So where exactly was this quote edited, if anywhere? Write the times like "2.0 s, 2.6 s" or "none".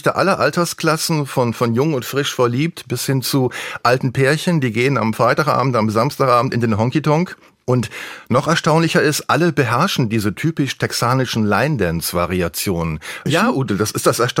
13.3 s